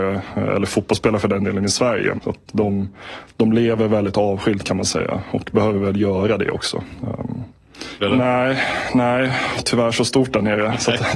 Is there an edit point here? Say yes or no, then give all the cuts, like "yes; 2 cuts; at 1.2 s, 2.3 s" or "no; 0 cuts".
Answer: yes; 3 cuts; at 2.1 s, 8.0 s, 9.6 s